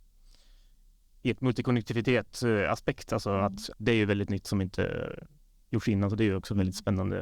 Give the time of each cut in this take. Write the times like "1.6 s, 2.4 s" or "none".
3.7 s